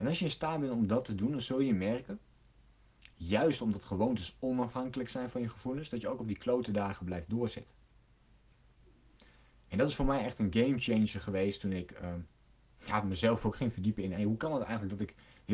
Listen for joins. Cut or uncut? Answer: uncut